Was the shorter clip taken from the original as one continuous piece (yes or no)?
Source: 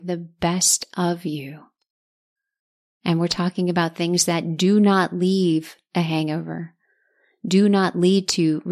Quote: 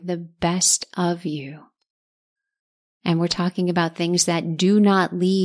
yes